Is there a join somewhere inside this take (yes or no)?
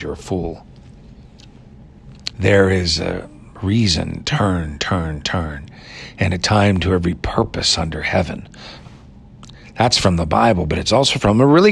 yes